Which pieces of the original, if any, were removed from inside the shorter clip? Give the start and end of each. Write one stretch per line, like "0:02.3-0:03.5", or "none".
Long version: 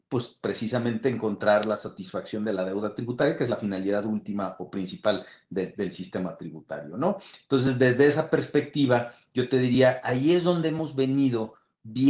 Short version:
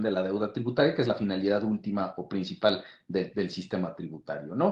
none